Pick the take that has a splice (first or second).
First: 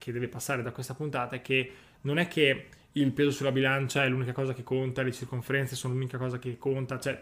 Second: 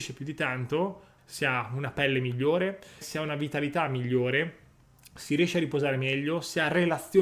second